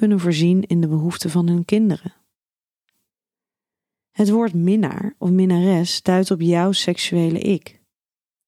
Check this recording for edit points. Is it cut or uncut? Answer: uncut